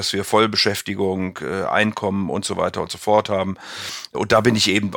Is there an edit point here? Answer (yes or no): no